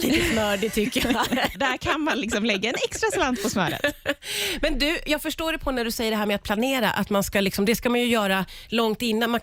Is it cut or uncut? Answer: cut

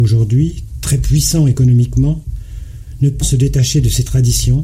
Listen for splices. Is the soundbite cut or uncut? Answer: cut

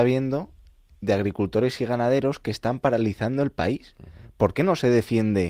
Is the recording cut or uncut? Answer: uncut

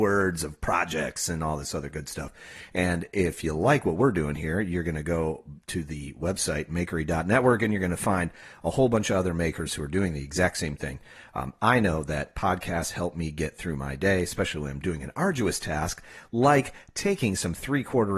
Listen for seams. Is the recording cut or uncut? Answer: uncut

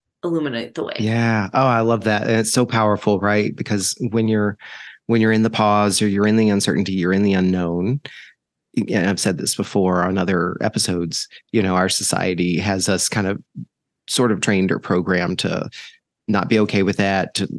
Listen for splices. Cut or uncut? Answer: uncut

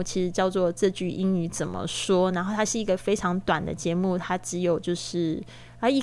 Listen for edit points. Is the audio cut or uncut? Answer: uncut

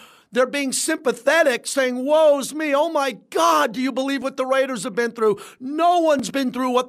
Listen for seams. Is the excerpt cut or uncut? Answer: uncut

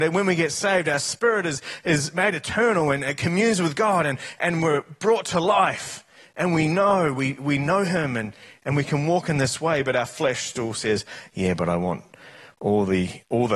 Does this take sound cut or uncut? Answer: uncut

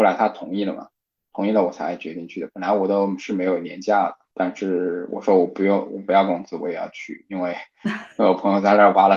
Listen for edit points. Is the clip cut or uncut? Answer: uncut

